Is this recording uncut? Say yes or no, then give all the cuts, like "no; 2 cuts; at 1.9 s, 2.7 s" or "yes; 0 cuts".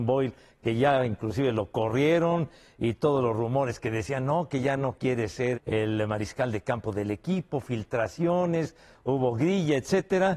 no; 1 cut; at 5.5 s